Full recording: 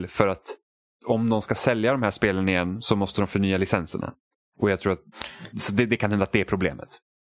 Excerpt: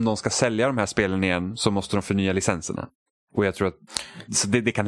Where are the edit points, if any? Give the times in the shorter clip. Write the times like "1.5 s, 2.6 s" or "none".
none